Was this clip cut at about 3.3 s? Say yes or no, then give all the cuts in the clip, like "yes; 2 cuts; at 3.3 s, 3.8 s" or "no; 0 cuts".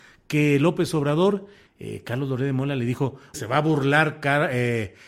yes; 2 cuts; at 1.7 s, 3.3 s